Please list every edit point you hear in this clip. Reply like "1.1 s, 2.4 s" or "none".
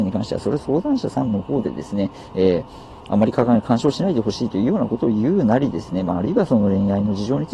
3.1 s